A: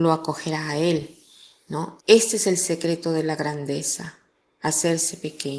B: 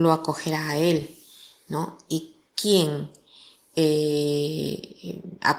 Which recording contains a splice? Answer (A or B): A